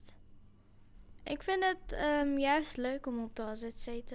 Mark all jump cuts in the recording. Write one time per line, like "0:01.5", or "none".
none